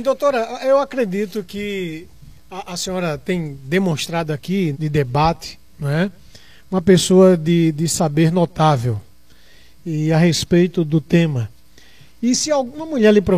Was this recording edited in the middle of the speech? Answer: yes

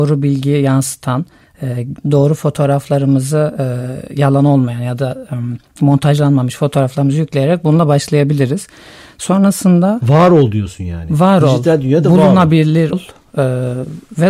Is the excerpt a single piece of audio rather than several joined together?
no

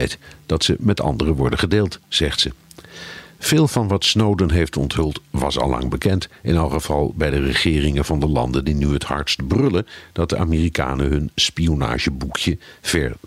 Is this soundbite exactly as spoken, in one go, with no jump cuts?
yes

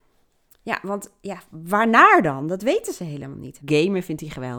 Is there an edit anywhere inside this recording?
yes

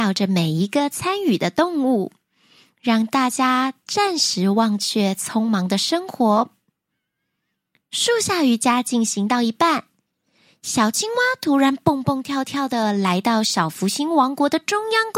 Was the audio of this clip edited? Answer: no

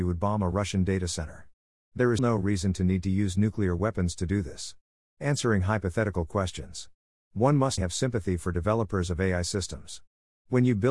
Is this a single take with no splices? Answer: no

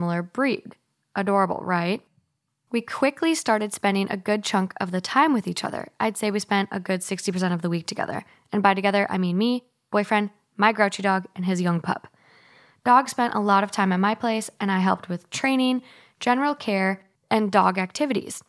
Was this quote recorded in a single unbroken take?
yes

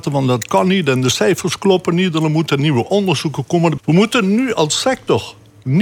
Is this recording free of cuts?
no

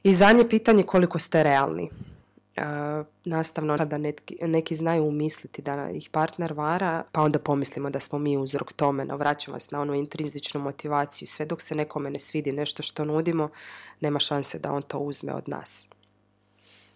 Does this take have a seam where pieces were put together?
yes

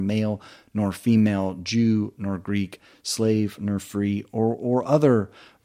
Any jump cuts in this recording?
no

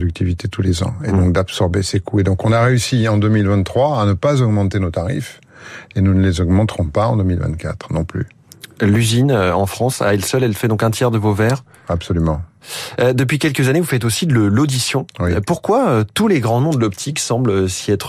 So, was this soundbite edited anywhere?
no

